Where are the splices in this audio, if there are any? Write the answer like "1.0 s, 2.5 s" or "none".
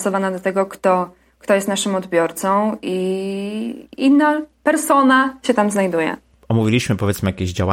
none